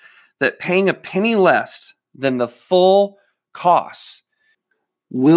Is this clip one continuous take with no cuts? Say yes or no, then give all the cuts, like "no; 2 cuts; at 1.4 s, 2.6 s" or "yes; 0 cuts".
yes; 0 cuts